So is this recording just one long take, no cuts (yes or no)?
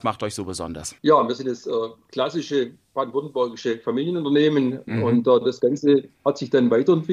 no